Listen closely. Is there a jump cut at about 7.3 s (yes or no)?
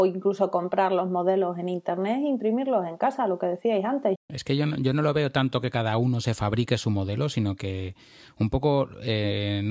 no